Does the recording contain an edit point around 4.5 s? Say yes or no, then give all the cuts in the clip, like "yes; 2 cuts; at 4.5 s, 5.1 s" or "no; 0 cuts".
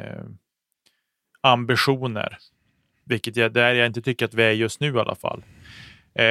no; 0 cuts